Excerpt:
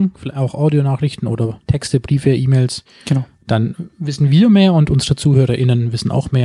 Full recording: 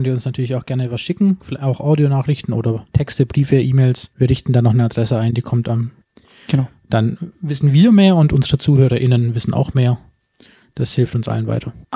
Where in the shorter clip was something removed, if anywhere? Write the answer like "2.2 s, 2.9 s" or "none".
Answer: 2.9 s